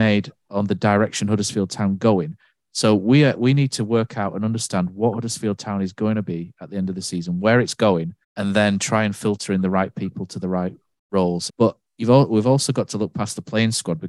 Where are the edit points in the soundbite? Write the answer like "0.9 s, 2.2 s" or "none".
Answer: 8.2 s, 11.5 s